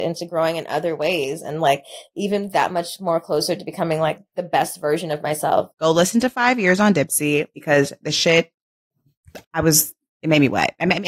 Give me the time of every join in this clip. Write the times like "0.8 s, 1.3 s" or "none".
5.7 s, 9.4 s